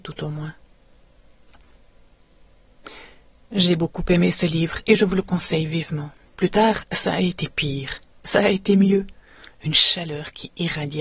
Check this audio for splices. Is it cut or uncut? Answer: cut